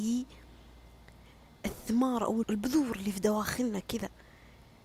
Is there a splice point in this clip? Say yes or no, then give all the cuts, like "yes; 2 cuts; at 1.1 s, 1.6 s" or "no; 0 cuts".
yes; 1 cut; at 2.4 s